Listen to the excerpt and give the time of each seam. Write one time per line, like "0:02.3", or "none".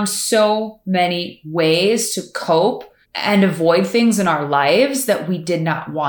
0:03.0